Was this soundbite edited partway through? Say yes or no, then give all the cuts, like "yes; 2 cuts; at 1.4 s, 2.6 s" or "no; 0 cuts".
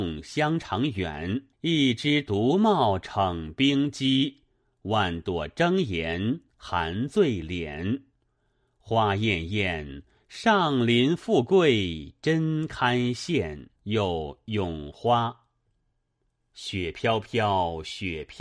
yes; 2 cuts; at 1.5 s, 13.8 s